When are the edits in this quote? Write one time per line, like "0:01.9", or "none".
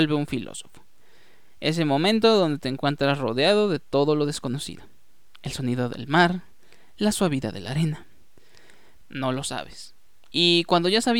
0:09.0
0:10.3